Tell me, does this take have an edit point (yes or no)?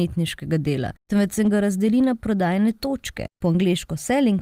no